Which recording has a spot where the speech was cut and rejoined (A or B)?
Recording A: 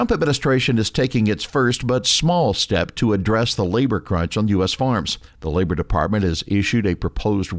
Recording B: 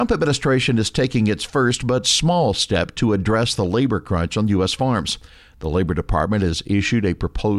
A